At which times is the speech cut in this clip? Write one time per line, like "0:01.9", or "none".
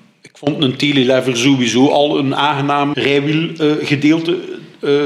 0:02.9